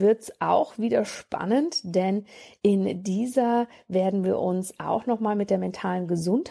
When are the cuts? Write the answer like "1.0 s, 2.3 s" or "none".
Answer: none